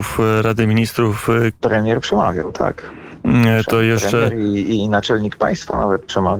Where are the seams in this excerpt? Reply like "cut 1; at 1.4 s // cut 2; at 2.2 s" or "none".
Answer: cut 1; at 1.6 s